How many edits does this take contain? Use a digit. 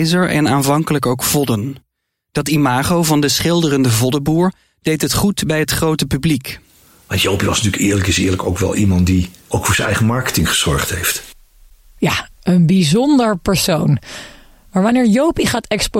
0